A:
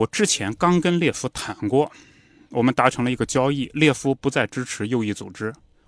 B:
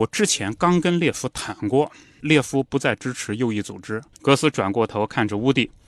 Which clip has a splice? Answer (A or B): B